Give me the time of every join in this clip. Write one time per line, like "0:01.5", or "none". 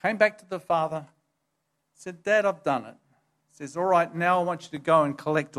none